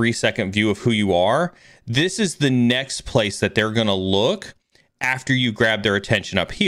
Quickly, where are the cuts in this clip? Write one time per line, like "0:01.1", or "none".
none